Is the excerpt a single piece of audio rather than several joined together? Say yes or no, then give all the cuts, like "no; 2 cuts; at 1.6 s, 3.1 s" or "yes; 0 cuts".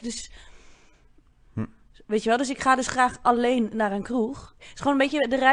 no; 2 cuts; at 1.4 s, 4.6 s